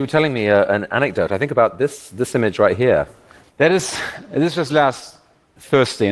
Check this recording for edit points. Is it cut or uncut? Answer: cut